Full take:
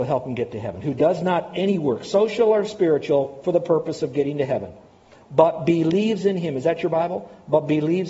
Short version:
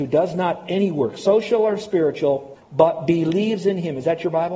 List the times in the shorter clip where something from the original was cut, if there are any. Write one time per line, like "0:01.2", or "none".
0:02.5

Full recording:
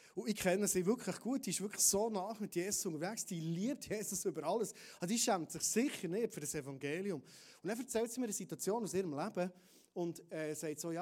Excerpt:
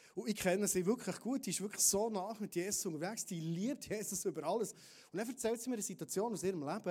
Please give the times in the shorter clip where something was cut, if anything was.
0:04.7

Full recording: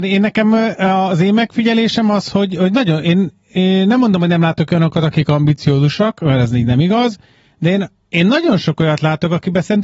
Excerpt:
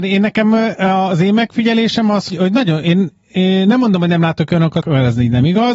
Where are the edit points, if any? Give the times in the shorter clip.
0:02.3
0:04.8

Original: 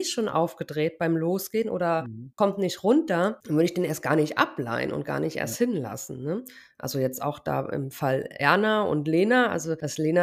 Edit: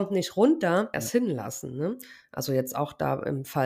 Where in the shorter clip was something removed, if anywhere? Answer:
0:00.9

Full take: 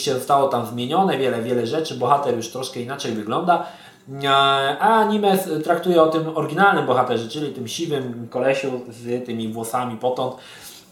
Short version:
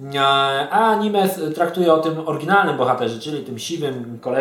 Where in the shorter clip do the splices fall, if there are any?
none

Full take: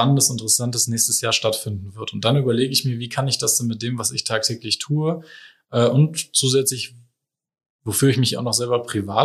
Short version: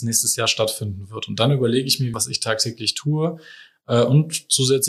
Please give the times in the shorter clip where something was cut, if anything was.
0:02.1

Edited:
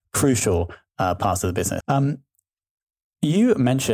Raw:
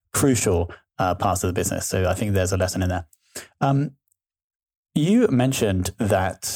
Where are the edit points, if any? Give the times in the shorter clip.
0:01.8

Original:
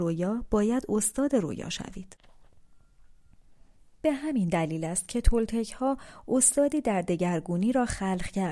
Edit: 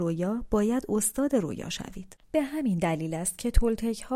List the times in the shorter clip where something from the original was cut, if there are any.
0:02.2

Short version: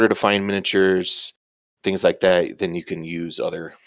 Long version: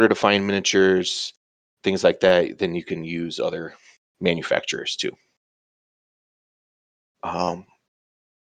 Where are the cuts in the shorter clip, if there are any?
none

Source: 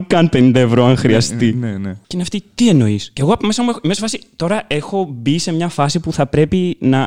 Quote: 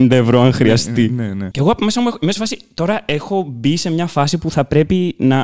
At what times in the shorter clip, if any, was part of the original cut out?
0:01.5

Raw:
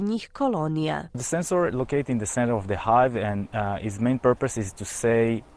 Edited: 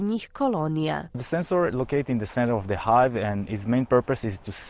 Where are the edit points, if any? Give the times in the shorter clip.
0:03.5

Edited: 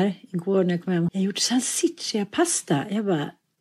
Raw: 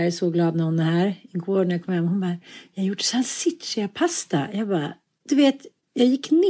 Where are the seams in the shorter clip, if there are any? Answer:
0:01.1

